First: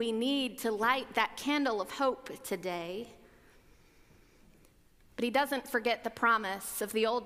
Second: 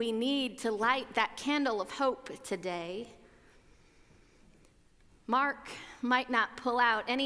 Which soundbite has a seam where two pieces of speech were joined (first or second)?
first